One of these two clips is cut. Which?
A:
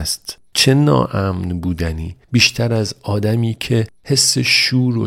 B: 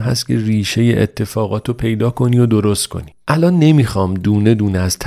A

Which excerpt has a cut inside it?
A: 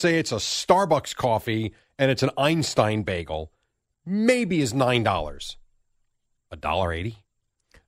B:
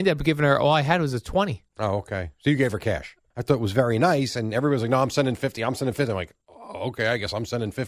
B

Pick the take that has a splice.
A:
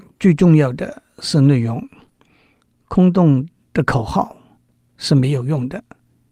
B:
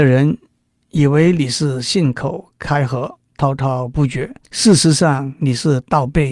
B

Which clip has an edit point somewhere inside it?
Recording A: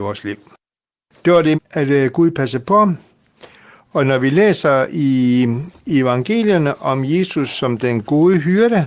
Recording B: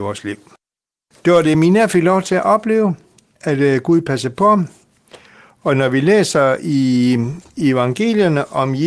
A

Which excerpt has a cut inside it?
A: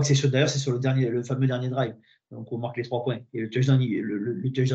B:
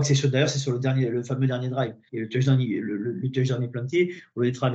B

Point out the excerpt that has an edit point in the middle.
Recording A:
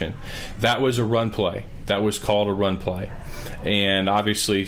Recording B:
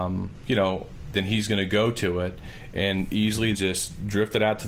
B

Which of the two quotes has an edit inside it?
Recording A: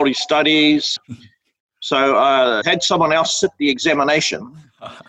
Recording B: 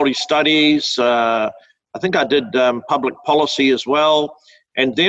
A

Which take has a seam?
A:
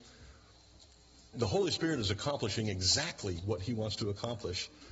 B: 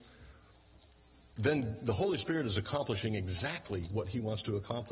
A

